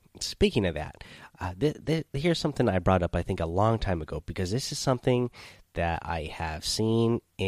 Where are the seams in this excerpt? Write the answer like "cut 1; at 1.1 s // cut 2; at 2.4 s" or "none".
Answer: none